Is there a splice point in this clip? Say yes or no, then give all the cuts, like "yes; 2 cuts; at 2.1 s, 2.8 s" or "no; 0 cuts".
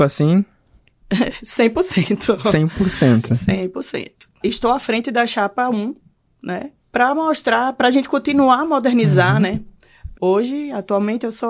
yes; 3 cuts; at 4.4 s, 6.8 s, 10.1 s